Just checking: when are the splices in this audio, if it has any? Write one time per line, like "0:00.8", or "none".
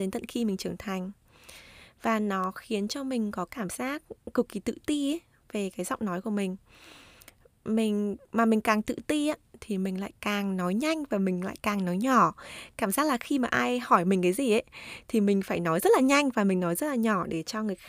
0:08.2